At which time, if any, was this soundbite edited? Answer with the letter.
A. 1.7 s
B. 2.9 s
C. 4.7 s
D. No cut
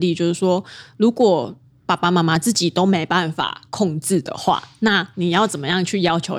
D